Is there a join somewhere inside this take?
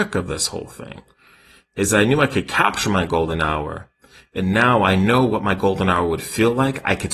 no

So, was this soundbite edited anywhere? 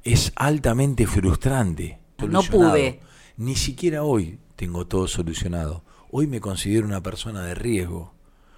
yes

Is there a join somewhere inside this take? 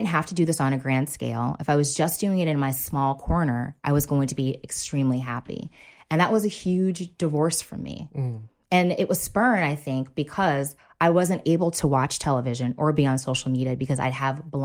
no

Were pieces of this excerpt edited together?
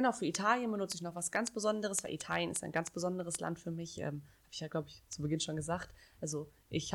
no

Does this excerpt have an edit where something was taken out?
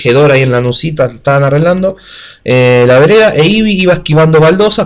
no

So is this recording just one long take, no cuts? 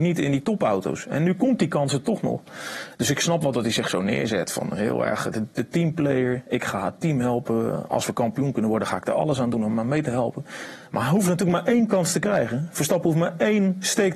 yes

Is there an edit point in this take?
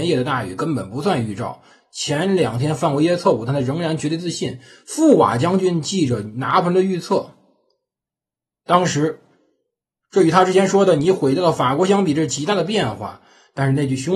no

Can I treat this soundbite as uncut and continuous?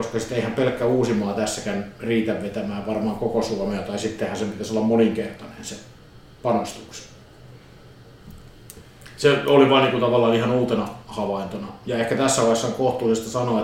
yes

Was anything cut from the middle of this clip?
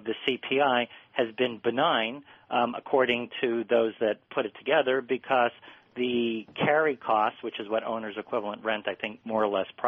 no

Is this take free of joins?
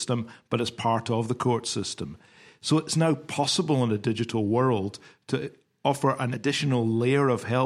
yes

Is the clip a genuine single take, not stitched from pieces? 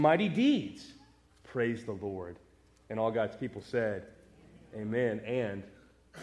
no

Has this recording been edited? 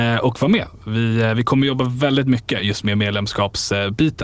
no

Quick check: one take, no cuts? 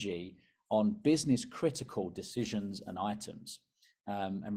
yes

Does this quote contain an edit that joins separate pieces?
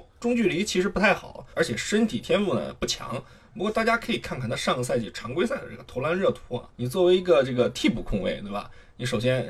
no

